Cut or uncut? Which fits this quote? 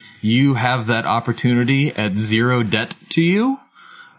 cut